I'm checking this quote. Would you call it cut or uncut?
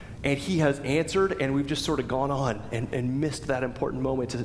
uncut